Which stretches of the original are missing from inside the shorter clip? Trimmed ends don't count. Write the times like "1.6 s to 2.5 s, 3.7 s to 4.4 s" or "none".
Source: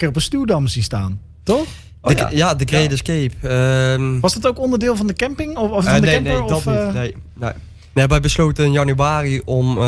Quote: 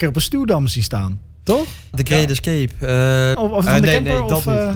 1.9 s to 2.6 s, 4.0 s to 5.5 s